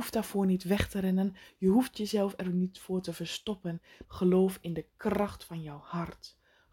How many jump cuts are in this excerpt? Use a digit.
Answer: 1